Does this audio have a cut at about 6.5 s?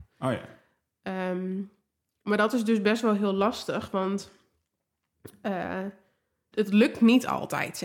yes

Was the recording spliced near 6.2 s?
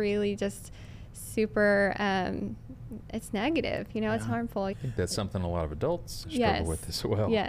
yes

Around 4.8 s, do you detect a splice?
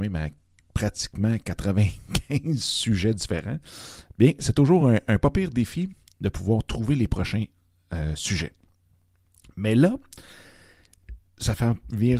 no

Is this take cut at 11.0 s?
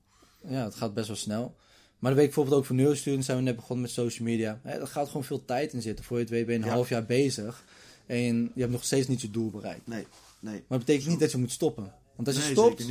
no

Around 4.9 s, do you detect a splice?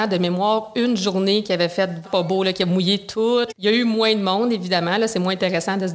no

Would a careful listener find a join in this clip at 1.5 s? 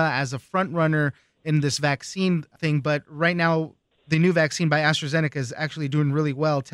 no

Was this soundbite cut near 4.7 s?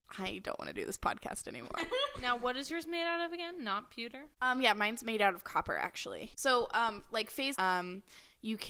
no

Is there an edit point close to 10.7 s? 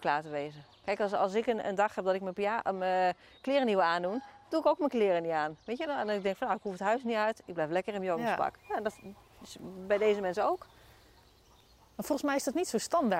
no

